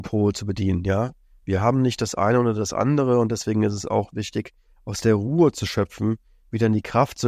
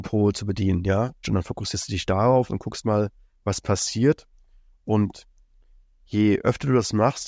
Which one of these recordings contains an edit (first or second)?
second